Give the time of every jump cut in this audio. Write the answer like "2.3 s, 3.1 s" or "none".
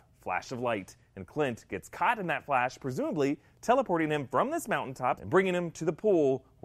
5.2 s

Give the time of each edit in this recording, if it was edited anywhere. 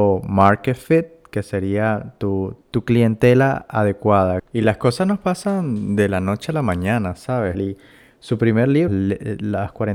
2.6 s, 7.5 s, 8.9 s

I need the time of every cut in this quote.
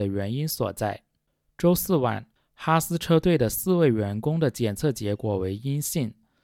2.4 s

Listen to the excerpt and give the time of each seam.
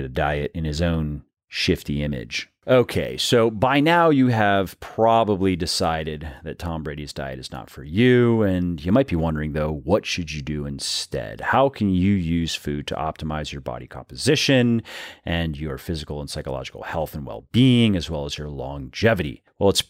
none

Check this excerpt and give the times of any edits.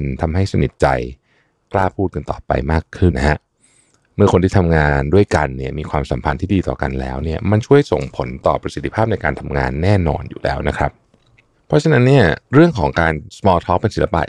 3.1 s, 12.4 s

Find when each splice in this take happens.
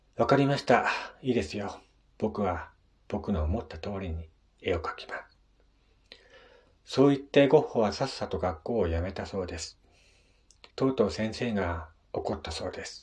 10.7 s

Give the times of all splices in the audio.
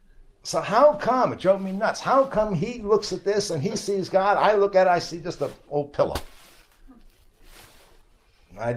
none

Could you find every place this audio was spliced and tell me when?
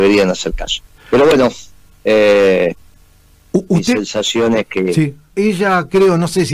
1.0 s, 5.3 s

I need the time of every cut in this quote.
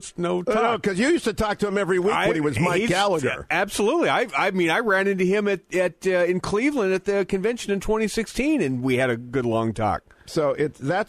none

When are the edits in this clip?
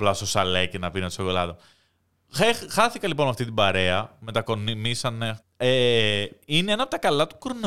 5.4 s

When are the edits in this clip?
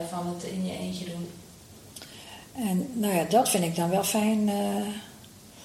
2.5 s

